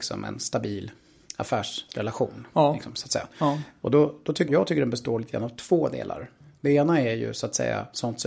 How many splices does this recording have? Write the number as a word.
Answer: one